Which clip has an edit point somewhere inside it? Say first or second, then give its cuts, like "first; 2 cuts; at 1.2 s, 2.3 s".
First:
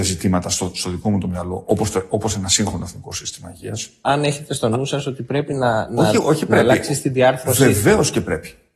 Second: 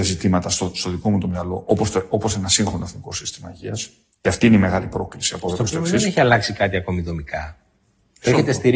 first; 1 cut; at 4.0 s